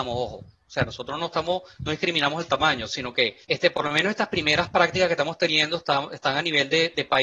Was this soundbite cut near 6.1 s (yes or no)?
no